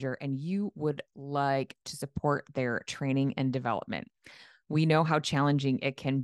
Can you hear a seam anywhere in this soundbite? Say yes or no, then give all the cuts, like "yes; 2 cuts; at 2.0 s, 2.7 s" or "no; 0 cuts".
no; 0 cuts